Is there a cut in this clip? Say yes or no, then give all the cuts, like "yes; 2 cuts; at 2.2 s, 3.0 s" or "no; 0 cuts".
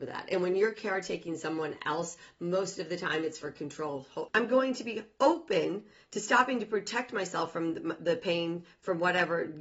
yes; 1 cut; at 4.3 s